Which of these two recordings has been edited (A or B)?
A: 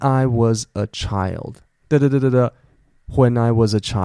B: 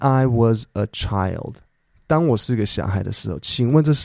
A